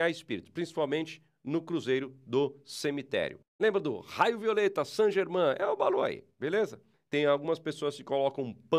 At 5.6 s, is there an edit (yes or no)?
no